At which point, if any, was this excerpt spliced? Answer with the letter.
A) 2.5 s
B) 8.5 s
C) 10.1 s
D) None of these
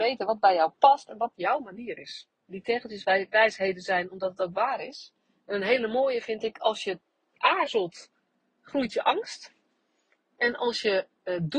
A